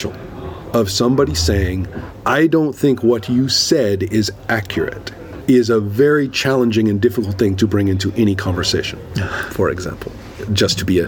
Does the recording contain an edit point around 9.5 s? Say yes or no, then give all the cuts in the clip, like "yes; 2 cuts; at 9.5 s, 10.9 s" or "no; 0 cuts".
yes; 1 cut; at 9.5 s